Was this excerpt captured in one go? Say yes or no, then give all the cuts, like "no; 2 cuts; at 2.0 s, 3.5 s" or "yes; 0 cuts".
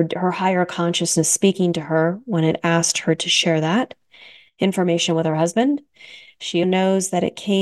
no; 1 cut; at 6.6 s